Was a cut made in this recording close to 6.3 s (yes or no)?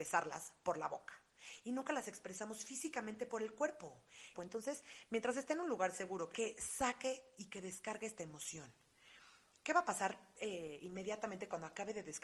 yes